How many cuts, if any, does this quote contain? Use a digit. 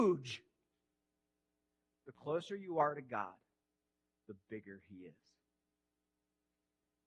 0